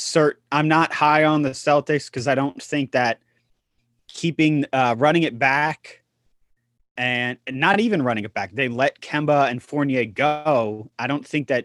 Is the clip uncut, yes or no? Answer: yes